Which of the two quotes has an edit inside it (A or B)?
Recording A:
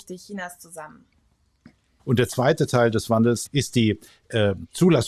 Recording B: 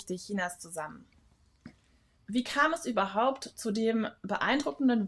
A